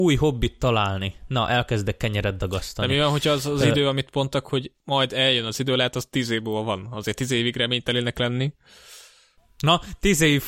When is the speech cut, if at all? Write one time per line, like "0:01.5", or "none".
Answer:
none